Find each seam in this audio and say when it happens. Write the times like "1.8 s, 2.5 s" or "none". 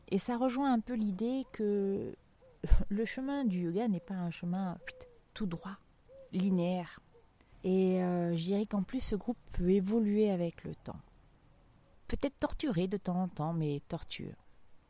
7.5 s, 11.9 s